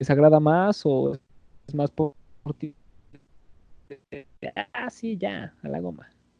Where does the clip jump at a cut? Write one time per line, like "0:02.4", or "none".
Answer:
none